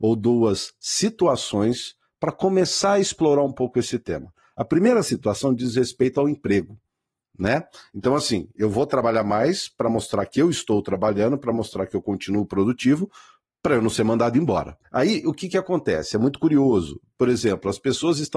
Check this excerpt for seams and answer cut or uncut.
cut